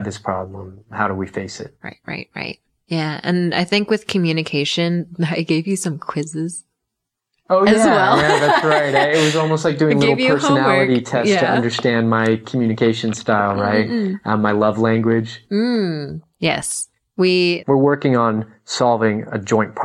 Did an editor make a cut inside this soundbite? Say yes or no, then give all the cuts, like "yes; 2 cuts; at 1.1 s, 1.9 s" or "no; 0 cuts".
yes; 1 cut; at 17.6 s